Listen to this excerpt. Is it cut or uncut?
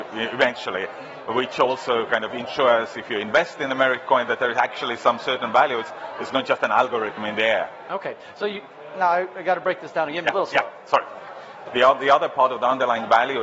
cut